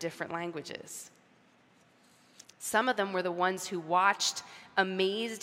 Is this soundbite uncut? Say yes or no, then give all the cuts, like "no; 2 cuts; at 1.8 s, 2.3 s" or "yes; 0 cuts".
no; 1 cut; at 2.4 s